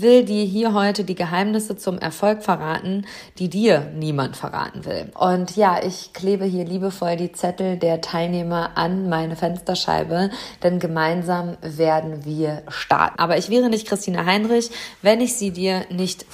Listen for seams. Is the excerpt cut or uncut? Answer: cut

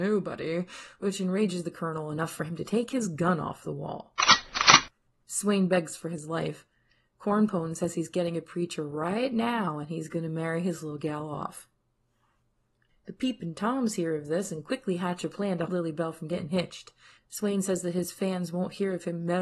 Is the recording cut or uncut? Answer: cut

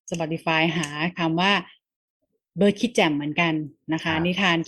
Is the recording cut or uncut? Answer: uncut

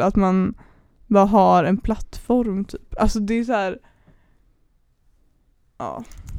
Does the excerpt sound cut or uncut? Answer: uncut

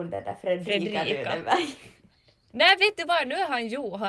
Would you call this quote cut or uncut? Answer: uncut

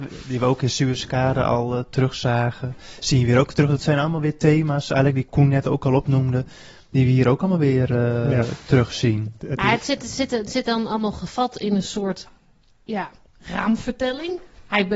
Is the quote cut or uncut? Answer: uncut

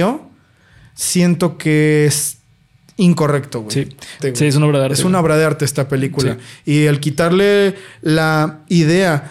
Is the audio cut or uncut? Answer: cut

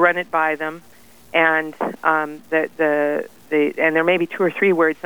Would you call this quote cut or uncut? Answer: uncut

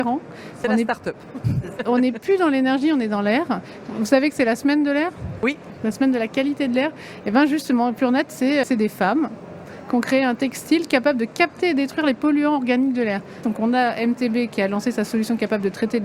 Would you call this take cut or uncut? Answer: cut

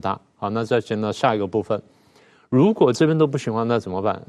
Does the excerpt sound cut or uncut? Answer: uncut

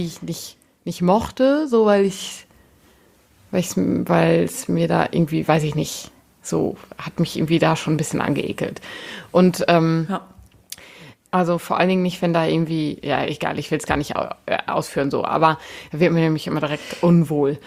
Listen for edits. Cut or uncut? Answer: cut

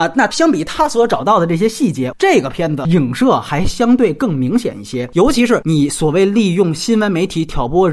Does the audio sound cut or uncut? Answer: cut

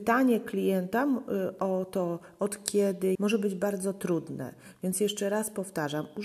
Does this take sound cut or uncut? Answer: cut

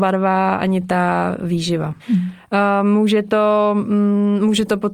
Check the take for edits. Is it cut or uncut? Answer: cut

